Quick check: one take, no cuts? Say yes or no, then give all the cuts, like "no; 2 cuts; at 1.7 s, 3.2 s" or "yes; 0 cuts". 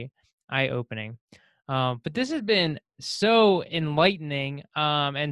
yes; 0 cuts